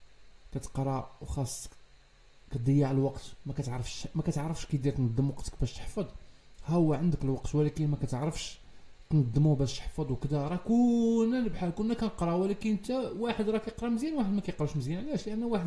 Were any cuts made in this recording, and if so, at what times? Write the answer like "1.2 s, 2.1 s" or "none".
11.5 s